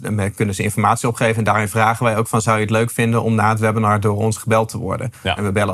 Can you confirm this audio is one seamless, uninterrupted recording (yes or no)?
yes